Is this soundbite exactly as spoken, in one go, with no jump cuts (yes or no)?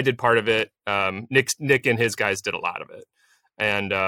yes